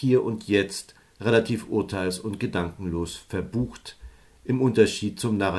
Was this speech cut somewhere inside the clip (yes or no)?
no